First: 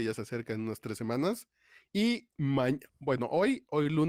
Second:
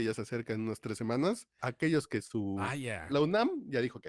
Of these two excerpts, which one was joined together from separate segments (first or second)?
second